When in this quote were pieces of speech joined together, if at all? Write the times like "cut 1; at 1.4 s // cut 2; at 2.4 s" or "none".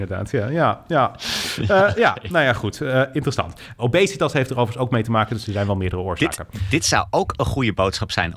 cut 1; at 3.8 s